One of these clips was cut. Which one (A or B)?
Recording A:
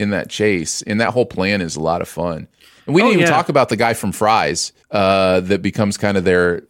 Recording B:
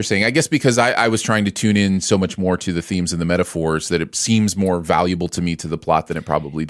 A